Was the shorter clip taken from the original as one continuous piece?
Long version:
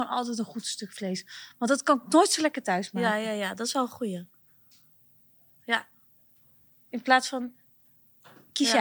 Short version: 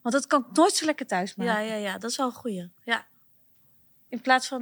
no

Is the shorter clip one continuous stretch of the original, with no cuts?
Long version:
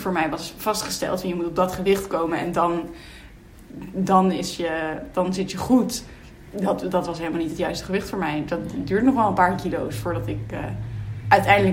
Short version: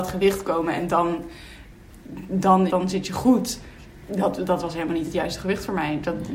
no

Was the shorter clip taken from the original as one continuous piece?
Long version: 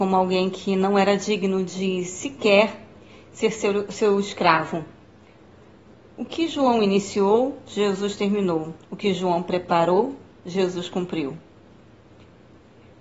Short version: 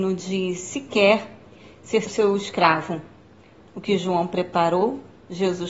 no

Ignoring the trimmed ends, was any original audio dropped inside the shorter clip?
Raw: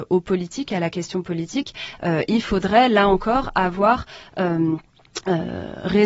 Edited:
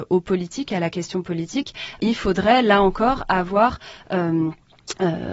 yes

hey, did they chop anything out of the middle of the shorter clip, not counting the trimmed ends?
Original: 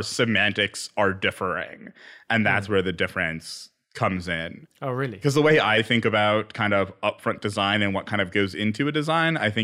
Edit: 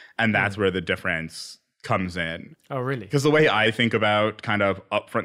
no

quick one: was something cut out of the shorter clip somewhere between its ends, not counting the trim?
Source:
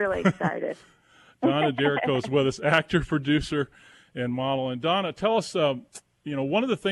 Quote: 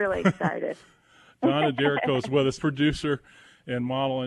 yes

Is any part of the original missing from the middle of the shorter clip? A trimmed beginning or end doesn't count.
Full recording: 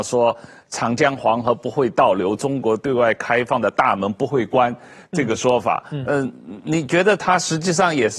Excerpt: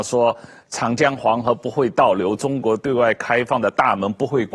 no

